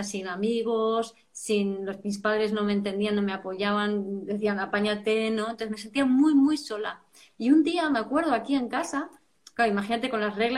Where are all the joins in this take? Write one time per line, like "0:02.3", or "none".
0:09.5